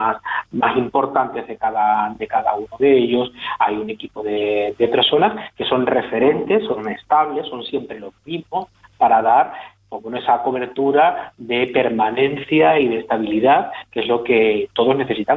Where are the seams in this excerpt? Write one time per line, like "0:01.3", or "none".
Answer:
none

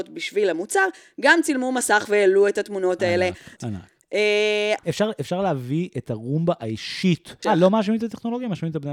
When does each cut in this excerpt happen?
0:03.6
0:04.8
0:07.4

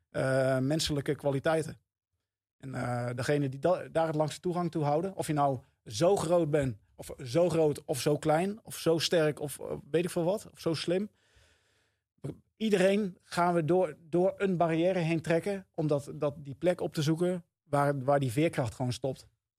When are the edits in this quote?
none

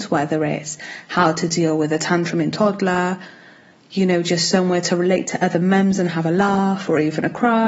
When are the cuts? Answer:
none

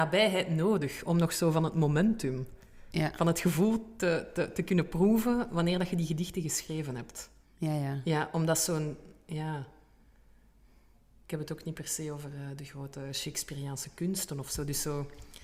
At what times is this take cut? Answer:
0:07.4

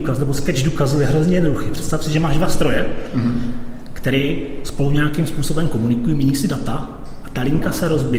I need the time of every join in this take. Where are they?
none

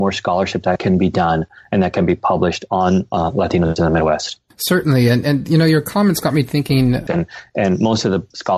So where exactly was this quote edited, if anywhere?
0:07.1

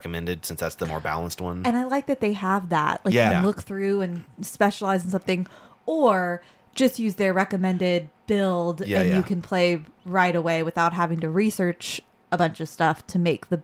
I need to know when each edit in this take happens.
0:03.3

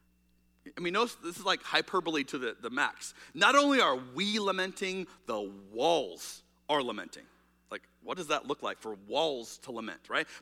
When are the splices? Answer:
none

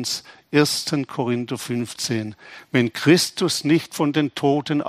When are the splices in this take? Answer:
none

